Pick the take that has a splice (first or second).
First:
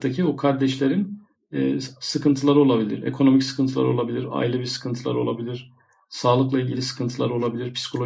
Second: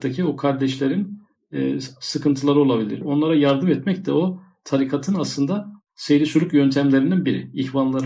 second